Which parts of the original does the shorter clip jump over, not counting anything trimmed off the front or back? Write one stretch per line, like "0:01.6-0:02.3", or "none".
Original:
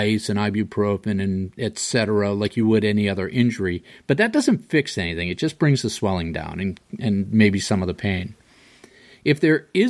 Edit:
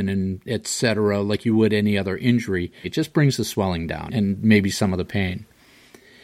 0:03.9-0:05.3
0:06.5-0:07.0